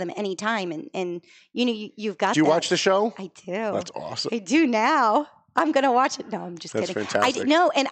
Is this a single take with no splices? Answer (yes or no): yes